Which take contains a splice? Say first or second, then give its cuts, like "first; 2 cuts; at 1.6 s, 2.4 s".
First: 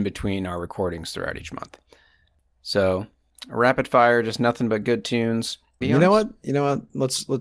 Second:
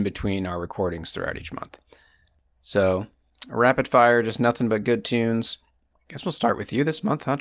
first; 1 cut; at 5.8 s